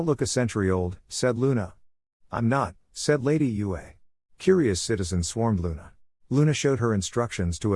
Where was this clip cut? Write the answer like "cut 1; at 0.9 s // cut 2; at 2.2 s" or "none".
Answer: cut 1; at 4.3 s // cut 2; at 6.2 s